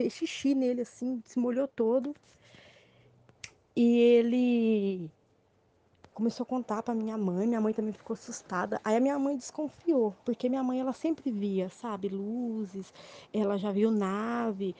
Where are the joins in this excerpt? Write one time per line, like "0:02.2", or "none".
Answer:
0:06.1
0:13.3

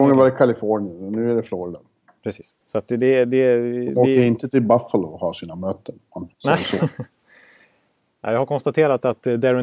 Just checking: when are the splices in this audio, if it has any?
0:02.6
0:06.3

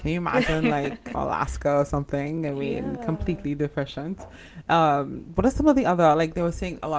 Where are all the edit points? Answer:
0:01.1

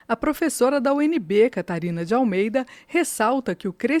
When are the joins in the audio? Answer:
none

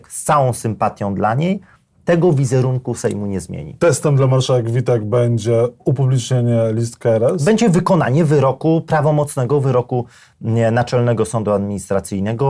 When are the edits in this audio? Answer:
0:05.8

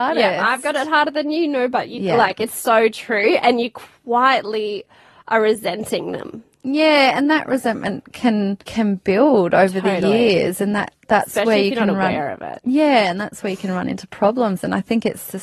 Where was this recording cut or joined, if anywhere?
0:08.6

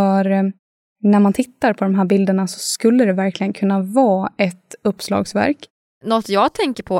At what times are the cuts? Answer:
0:05.9

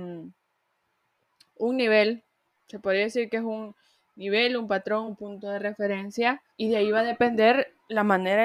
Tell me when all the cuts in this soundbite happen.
0:05.1
0:06.5

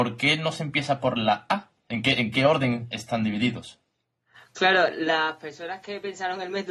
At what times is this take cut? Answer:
0:01.8

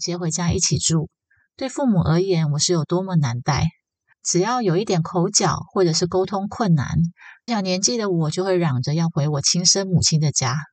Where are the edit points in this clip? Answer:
0:04.1
0:07.5

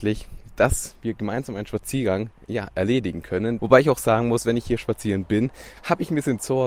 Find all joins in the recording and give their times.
0:03.6

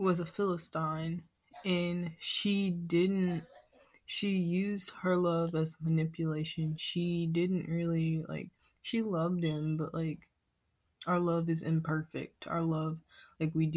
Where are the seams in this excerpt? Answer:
none

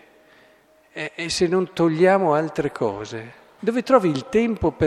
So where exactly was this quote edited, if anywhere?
0:03.6

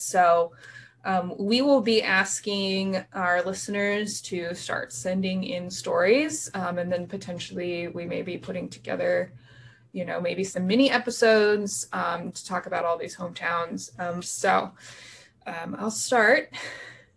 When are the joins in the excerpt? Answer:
0:14.2

